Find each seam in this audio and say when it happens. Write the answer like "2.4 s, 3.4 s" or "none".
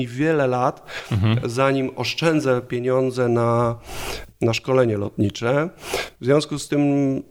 none